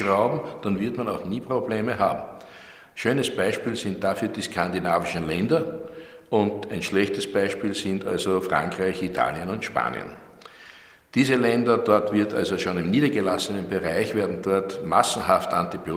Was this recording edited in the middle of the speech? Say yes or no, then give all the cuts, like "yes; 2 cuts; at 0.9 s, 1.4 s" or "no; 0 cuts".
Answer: no; 0 cuts